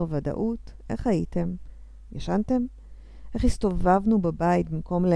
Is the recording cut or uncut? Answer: cut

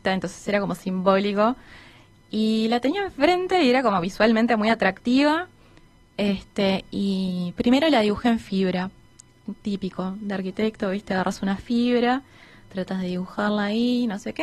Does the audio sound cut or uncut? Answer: uncut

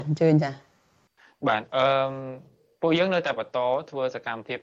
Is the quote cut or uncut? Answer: cut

